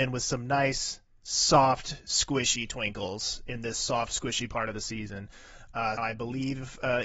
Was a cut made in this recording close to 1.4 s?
no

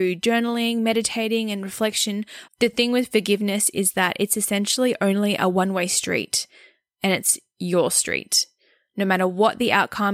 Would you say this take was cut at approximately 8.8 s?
no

